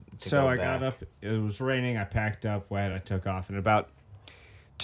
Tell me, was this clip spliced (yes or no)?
no